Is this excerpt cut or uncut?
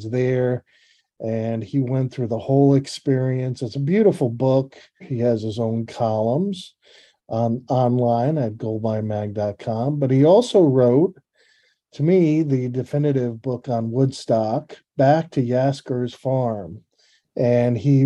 cut